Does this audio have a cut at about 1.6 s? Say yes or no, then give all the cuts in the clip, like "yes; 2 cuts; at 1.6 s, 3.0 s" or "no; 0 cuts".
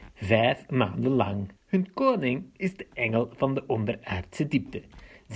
yes; 1 cut; at 1.6 s